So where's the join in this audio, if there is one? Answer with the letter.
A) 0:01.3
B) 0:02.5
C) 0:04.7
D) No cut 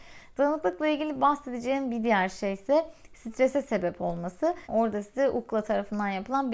C